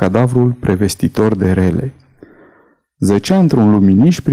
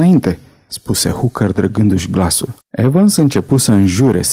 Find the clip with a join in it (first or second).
second